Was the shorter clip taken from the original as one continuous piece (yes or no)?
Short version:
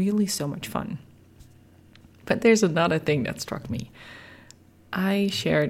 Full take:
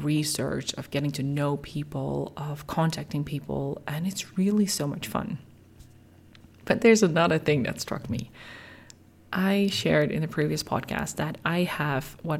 yes